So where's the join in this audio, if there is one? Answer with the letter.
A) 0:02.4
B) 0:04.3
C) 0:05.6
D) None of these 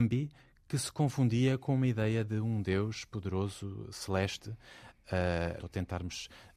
C